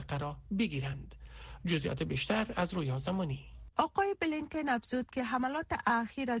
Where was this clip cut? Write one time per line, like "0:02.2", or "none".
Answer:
0:03.7